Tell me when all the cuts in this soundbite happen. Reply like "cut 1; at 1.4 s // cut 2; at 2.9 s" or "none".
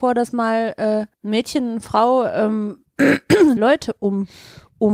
cut 1; at 1.1 s // cut 2; at 3.6 s